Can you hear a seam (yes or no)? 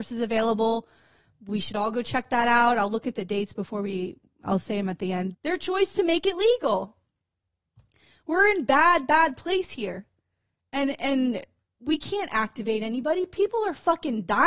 yes